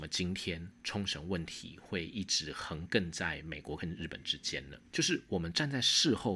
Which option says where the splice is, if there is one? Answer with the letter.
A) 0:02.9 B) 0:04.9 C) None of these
B